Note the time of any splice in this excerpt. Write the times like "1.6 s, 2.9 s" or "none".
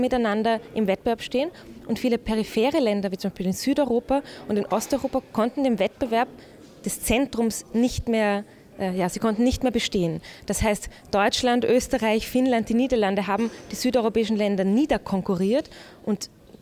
none